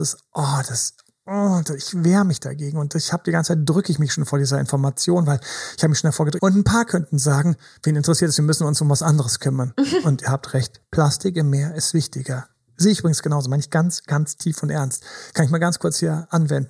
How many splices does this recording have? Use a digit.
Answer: 1